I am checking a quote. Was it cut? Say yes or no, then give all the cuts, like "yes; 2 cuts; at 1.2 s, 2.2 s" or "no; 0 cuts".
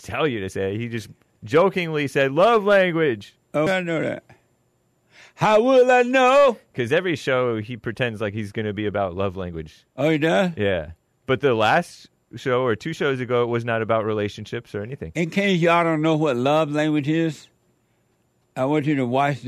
yes; 1 cut; at 3.7 s